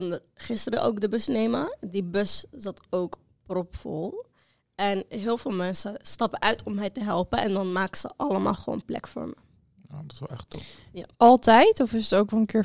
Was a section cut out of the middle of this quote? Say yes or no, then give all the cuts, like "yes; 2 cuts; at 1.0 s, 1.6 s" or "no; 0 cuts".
yes; 1 cut; at 11.1 s